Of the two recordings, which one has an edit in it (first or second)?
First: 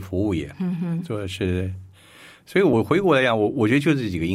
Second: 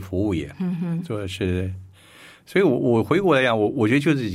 first